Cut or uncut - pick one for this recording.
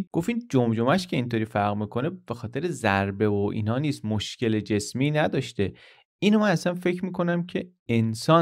uncut